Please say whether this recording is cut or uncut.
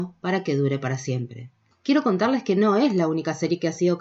cut